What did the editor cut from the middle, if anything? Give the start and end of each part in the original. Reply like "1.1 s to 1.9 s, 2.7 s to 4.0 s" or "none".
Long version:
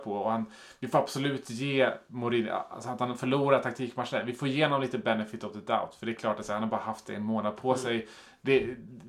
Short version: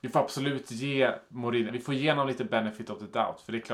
2.5 s to 4.2 s